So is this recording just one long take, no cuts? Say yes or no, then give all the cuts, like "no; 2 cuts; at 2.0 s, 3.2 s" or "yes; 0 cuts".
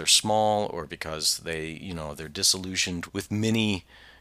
no; 1 cut; at 3.1 s